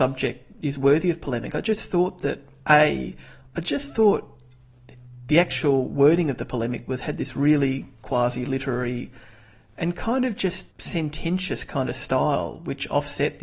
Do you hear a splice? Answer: yes; 1 cut; at 10.7 s

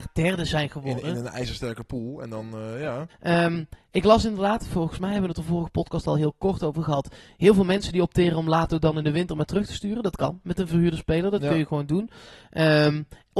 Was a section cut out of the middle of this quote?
yes; 1 cut; at 3.1 s

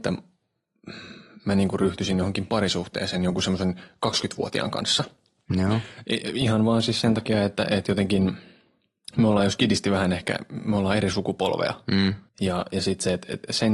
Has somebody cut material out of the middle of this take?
yes; 1 cut; at 12.3 s

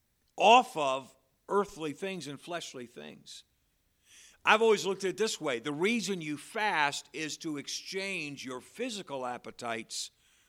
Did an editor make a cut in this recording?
no; 0 cuts

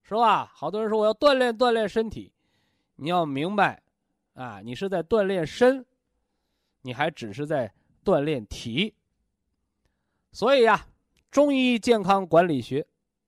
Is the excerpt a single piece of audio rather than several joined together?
yes; 0 cuts

